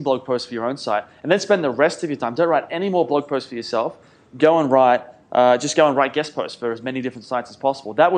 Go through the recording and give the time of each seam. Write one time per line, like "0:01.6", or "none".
none